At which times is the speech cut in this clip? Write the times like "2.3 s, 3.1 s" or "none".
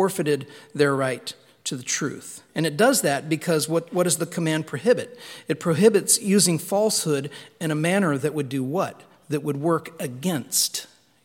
2.5 s